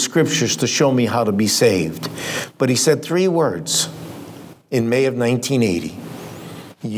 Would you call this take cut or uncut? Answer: uncut